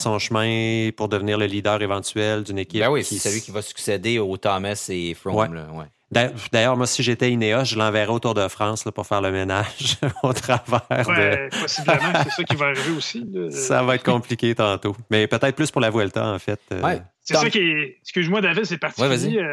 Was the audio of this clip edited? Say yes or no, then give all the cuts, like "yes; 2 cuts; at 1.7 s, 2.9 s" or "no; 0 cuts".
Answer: no; 0 cuts